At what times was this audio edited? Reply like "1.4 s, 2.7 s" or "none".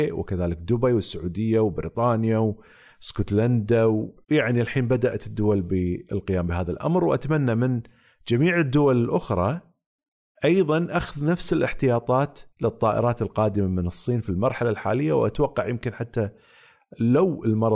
4.2 s, 12.5 s